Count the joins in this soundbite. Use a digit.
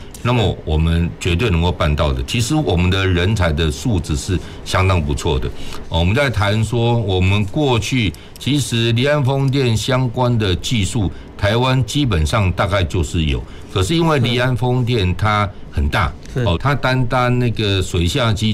2